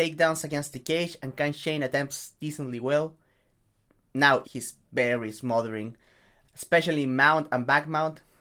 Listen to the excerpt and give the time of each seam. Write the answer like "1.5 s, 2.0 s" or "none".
4.4 s, 6.4 s

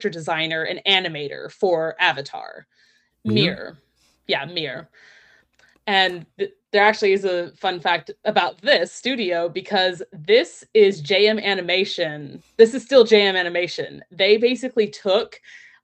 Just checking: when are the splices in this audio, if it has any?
3.1 s

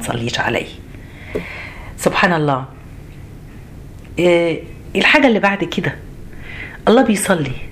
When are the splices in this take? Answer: none

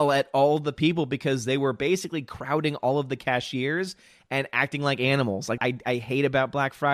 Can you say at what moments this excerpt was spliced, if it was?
5.6 s

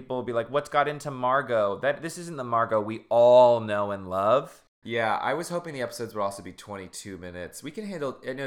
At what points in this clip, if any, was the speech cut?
4.7 s

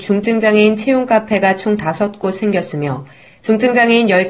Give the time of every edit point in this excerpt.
none

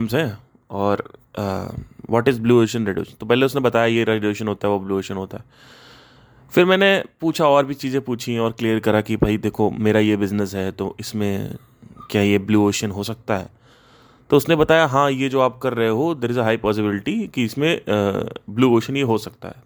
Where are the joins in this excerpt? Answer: none

